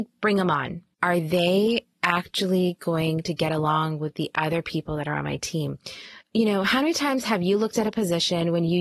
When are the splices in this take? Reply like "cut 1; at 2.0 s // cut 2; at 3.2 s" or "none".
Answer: cut 1; at 0.9 s // cut 2; at 6.2 s